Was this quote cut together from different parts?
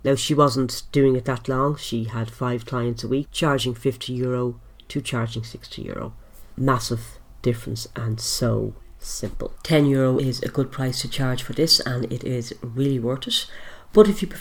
yes; 1 cut; at 3.3 s

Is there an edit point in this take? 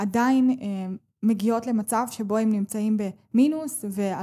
no; 0 cuts

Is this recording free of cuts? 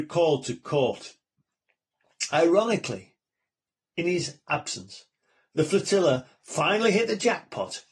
yes; 0 cuts

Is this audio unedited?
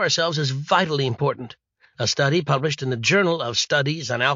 no; 1 cut; at 1.9 s

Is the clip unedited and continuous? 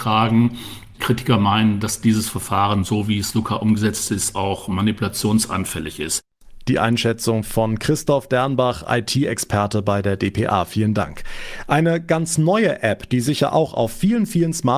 yes; 0 cuts

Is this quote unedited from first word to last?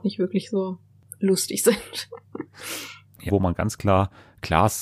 no; 1 cut; at 3.3 s

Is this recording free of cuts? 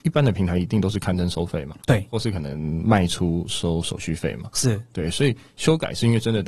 no; 1 cut; at 1.8 s

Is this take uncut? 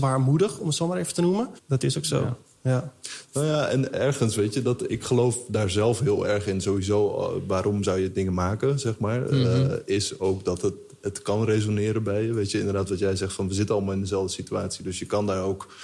no; 1 cut; at 1.6 s

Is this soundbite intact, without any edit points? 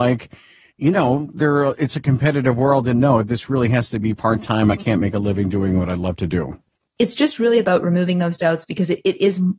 yes; 0 cuts

